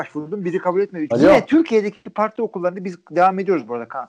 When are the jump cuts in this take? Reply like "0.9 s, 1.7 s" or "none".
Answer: 1.1 s